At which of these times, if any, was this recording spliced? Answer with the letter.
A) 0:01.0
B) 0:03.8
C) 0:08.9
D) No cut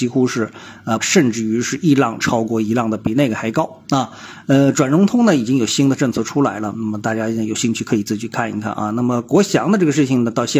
A